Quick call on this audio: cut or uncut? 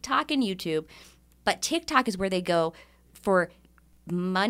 uncut